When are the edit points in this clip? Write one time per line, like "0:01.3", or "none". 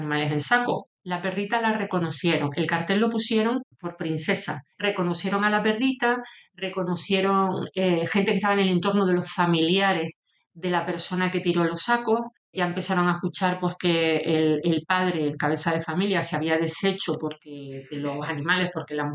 0:01.0
0:04.7